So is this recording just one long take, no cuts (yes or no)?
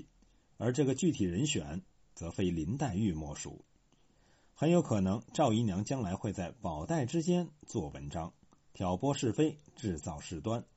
yes